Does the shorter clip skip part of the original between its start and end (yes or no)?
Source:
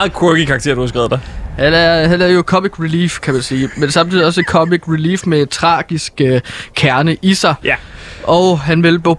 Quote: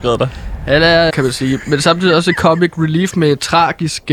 yes